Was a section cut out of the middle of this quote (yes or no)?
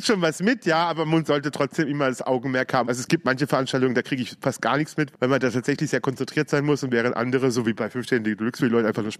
yes